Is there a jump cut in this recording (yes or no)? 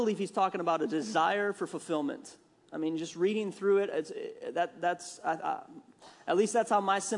no